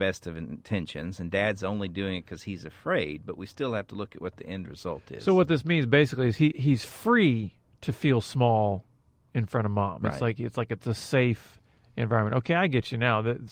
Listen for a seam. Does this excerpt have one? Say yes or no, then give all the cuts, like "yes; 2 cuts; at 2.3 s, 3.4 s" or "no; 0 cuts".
yes; 1 cut; at 6.5 s